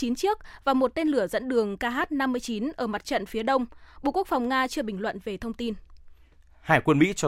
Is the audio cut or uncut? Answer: uncut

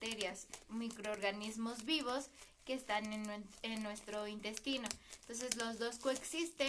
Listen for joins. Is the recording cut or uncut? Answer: uncut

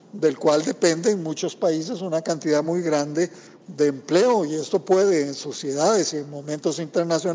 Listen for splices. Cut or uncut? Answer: uncut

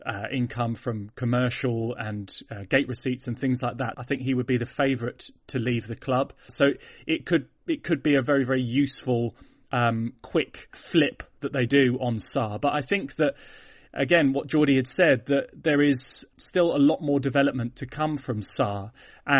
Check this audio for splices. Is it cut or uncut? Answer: cut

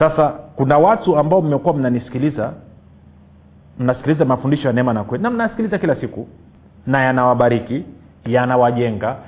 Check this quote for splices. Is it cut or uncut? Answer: uncut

